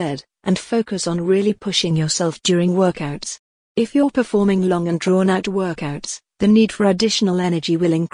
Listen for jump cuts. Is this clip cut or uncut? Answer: uncut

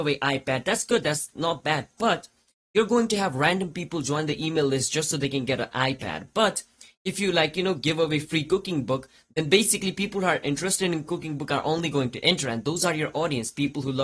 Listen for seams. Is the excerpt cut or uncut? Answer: uncut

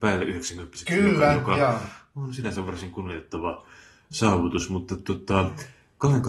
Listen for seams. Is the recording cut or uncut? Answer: uncut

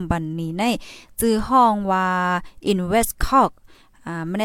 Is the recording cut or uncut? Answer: uncut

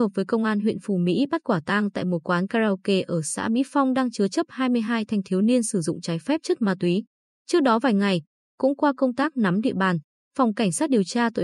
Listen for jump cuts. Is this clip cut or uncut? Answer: cut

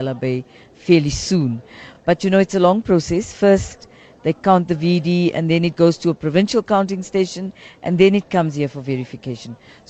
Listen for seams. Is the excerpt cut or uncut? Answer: uncut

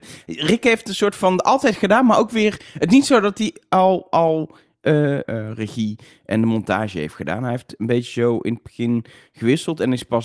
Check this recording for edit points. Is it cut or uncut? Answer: cut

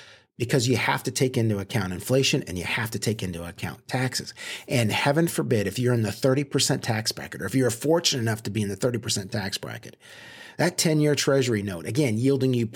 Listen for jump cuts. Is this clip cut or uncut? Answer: uncut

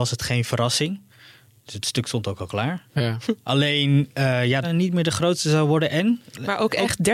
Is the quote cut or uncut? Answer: cut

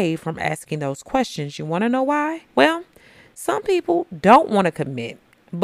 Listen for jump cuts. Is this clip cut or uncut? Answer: cut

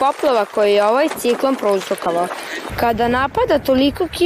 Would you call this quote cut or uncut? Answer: cut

